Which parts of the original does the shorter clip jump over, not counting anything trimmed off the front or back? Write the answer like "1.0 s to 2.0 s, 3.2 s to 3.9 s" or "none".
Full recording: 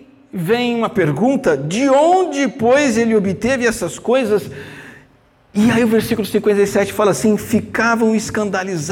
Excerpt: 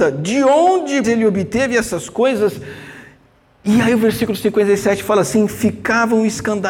2.5 s to 2.9 s